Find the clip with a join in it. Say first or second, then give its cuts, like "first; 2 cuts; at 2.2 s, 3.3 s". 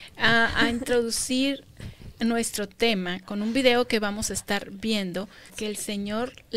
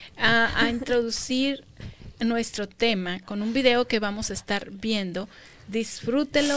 first; 1 cut; at 5.5 s